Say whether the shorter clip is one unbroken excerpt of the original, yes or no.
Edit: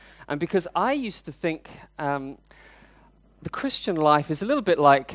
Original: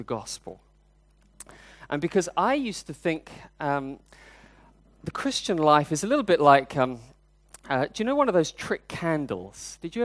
yes